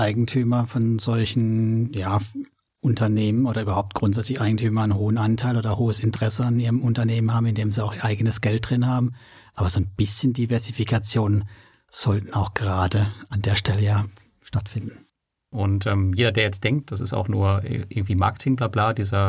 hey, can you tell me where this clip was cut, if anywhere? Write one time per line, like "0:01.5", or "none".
0:15.5